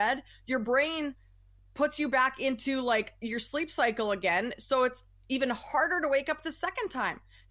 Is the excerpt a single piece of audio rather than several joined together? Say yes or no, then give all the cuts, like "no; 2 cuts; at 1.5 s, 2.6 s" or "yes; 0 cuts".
yes; 0 cuts